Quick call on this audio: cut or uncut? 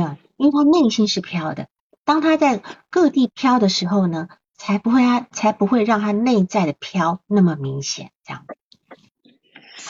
uncut